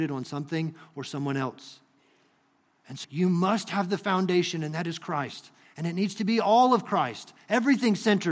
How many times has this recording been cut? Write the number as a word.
one